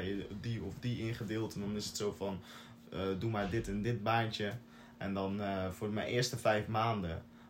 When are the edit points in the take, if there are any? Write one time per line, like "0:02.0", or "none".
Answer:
none